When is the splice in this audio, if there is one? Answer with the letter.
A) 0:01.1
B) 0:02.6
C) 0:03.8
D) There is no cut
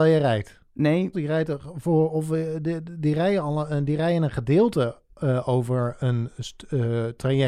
A